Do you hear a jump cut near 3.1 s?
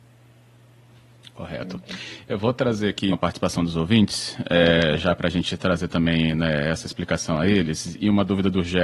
yes; 1 cut; at 3.1 s

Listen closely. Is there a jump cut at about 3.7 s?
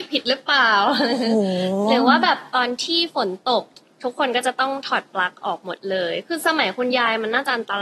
no; 0 cuts

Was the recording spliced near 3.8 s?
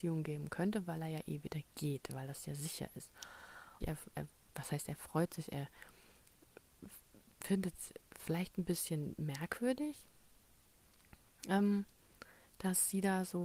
yes; 2 cuts; at 3.8 s, 8.1 s

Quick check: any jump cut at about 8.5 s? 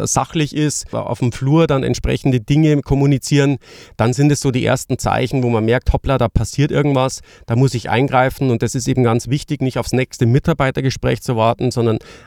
no; 0 cuts

